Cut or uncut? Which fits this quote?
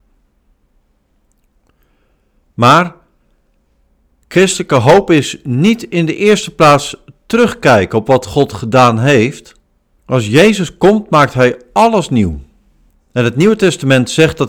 cut